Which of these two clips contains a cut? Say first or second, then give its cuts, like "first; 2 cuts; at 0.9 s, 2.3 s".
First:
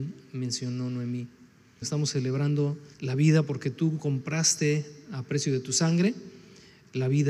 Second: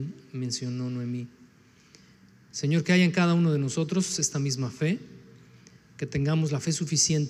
first; 2 cuts; at 1.8 s, 2.9 s